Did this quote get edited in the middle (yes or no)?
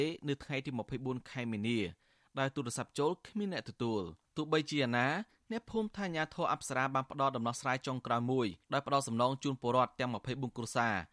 yes